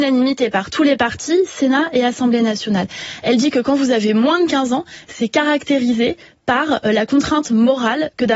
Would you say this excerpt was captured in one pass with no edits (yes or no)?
yes